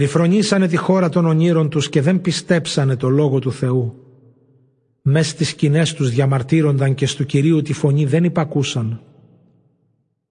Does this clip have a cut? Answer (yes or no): no